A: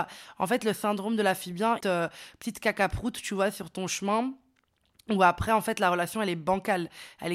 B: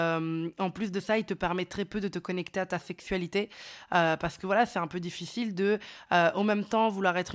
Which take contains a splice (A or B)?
A